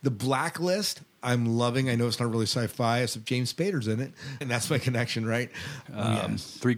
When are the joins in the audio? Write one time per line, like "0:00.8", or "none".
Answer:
0:04.4
0:05.9